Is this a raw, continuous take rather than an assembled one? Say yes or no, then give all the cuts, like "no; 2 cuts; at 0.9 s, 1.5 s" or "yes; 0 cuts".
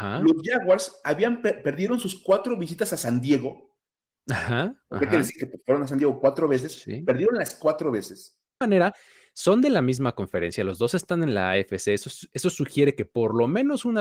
no; 1 cut; at 8.6 s